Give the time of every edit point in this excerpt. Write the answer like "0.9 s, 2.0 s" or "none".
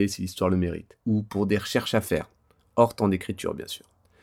1.0 s